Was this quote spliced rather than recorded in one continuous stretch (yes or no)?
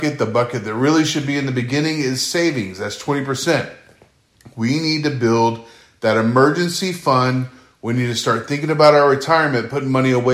no